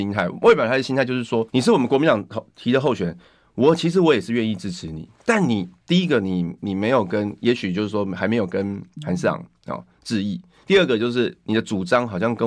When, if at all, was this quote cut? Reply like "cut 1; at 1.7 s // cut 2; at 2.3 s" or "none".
cut 1; at 1.5 s